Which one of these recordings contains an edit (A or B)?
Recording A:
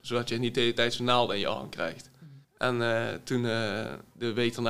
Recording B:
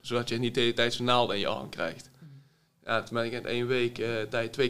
A